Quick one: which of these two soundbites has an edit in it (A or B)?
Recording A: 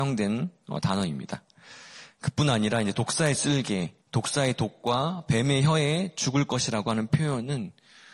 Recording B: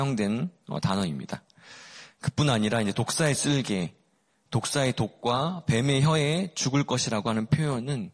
A